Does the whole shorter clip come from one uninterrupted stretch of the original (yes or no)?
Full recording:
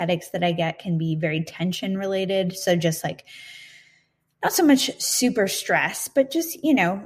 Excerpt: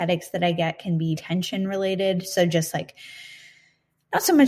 no